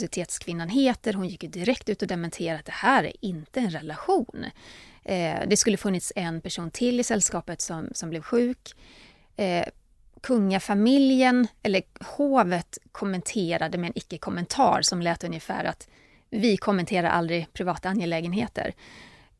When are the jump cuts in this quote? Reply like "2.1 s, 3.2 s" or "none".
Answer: none